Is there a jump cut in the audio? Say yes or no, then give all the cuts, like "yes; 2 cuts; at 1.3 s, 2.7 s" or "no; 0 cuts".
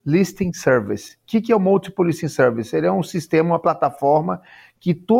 no; 0 cuts